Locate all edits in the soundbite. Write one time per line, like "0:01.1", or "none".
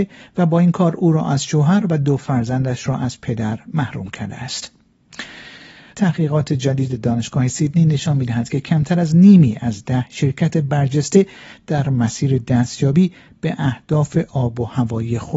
0:05.9